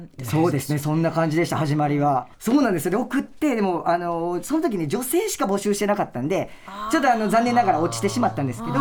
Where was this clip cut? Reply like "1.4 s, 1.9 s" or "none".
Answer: 2.3 s